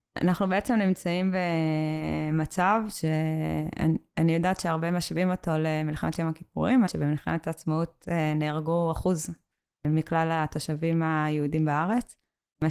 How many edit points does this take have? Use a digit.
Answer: 1